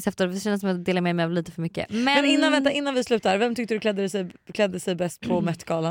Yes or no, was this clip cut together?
no